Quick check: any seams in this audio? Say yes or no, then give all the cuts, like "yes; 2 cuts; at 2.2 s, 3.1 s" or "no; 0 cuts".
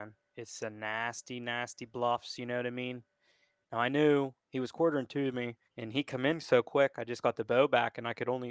yes; 2 cuts; at 3.6 s, 5.6 s